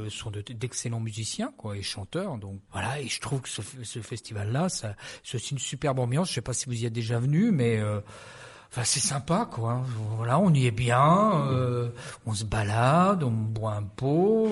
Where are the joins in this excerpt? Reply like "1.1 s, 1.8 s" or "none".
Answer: 2.7 s